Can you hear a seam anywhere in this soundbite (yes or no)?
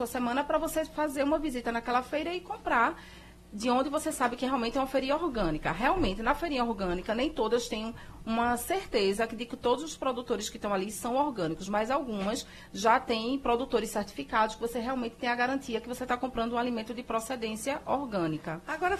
no